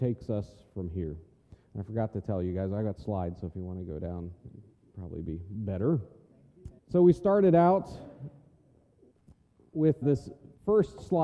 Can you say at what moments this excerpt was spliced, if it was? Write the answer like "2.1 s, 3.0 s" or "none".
6.8 s, 10.0 s